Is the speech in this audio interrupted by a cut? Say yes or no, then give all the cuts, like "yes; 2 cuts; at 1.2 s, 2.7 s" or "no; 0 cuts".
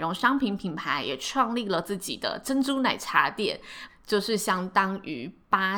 yes; 1 cut; at 3.9 s